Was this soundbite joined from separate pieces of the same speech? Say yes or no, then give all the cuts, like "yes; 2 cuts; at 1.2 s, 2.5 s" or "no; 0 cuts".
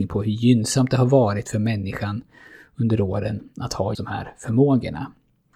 yes; 1 cut; at 4.0 s